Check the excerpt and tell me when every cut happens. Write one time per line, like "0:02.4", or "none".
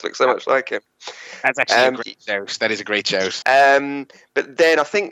0:03.4

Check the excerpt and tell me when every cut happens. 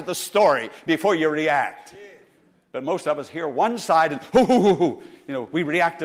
none

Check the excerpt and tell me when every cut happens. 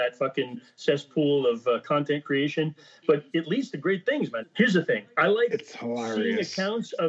0:04.4

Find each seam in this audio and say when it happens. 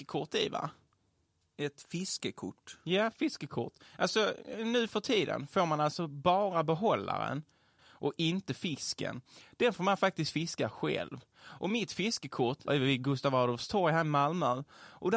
0:07.8
0:12.7

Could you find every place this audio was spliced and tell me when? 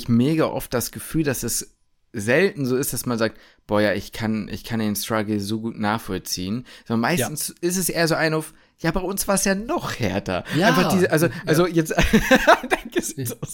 none

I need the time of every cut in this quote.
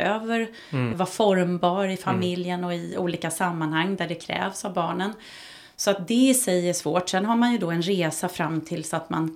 0:00.9

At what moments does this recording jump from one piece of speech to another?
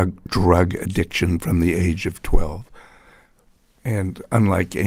none

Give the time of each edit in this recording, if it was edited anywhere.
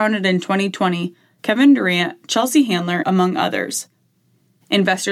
0:01.4
0:03.0

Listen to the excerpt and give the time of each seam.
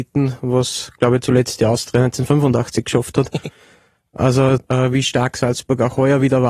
0:04.6

